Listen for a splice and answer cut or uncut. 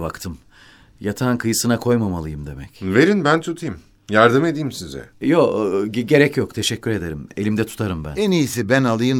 uncut